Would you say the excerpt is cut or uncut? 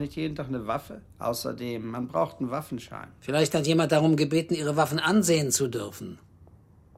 cut